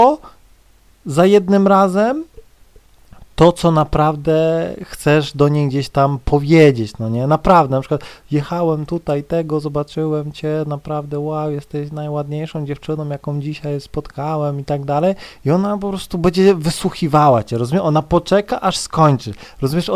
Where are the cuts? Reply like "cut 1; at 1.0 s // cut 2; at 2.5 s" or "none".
none